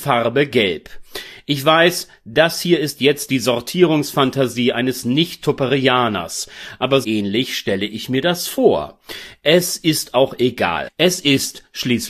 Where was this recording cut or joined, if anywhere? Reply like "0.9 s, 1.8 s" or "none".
7.0 s, 10.9 s